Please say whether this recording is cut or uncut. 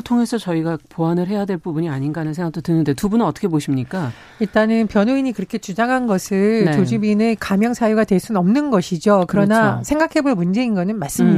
uncut